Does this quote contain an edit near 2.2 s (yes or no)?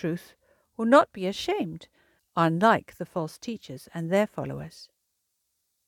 yes